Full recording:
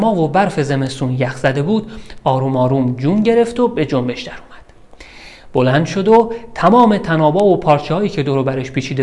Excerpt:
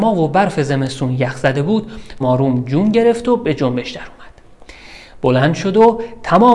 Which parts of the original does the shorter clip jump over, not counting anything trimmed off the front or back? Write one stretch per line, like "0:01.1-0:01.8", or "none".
0:02.2-0:02.5